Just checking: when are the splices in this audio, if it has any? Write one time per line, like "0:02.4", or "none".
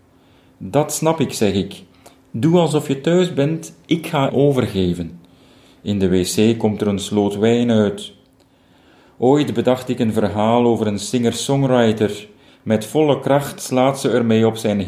0:04.3
0:12.5